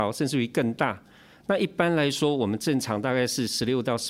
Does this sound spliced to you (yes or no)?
no